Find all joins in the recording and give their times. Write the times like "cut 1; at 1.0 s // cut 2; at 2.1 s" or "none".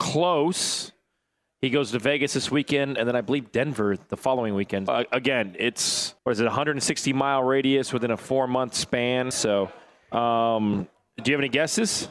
cut 1; at 4.9 s // cut 2; at 6.2 s // cut 3; at 9.3 s